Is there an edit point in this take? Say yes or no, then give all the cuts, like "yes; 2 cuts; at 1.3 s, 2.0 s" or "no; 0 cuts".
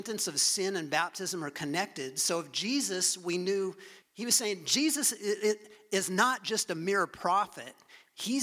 yes; 1 cut; at 4.0 s